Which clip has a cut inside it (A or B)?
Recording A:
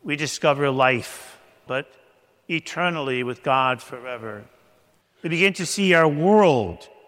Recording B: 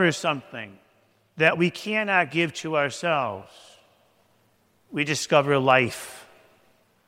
A